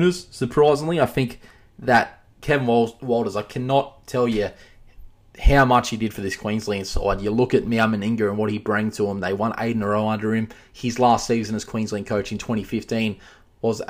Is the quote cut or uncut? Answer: uncut